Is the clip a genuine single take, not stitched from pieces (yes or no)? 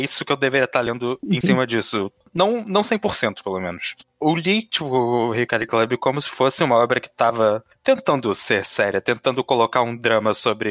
yes